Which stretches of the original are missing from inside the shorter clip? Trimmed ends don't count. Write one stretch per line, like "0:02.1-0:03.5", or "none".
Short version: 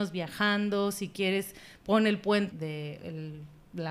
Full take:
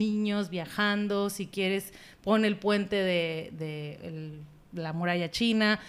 0:02.9-0:03.5